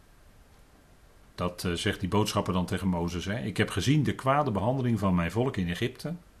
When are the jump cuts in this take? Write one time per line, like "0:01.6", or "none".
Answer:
0:01.2